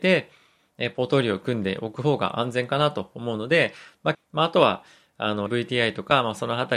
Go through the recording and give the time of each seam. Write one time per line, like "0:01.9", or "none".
0:04.1
0:05.5